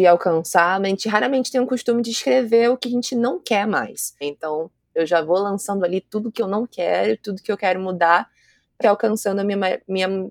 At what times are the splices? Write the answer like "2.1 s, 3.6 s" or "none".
4.2 s, 8.8 s